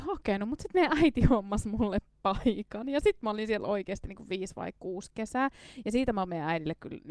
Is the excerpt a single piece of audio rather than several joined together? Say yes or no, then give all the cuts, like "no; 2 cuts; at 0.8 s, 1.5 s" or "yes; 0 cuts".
yes; 0 cuts